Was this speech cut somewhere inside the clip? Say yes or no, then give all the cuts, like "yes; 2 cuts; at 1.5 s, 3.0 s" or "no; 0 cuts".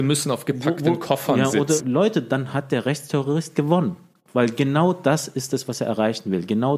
yes; 1 cut; at 1.8 s